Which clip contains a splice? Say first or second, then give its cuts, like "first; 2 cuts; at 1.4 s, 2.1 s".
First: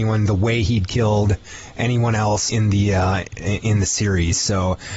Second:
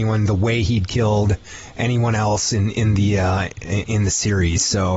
first; 1 cut; at 2.5 s